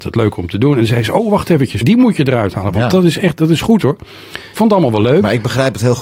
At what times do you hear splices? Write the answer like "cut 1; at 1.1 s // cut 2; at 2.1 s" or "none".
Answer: cut 1; at 1.8 s // cut 2; at 4.5 s